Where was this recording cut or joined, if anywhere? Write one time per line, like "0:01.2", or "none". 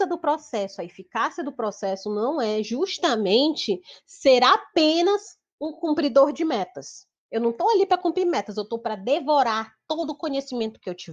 none